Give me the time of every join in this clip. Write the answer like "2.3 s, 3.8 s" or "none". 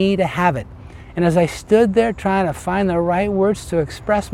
none